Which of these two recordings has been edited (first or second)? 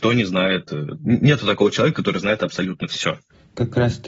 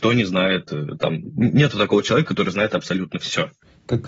first